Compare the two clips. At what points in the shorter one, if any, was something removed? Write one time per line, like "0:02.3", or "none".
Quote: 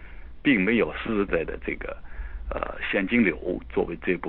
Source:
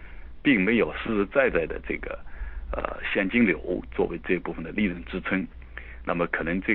0:01.3